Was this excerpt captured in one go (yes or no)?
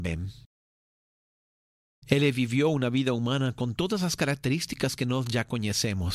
no